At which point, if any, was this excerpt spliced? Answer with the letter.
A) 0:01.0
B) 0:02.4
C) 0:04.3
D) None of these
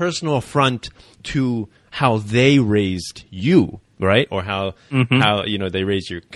D